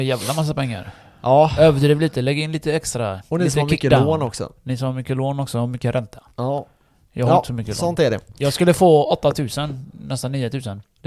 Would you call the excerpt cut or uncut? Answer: uncut